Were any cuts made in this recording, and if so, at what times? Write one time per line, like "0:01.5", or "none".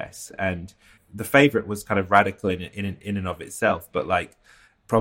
0:01.0